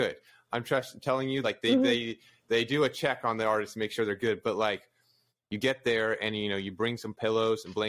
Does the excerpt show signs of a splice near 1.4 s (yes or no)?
no